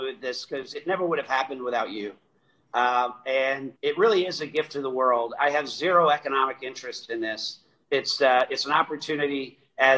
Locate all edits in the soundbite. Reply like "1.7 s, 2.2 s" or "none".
3.8 s